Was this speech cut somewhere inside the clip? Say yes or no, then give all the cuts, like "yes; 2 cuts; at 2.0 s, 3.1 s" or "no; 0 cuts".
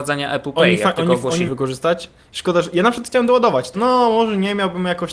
yes; 2 cuts; at 1.5 s, 3.7 s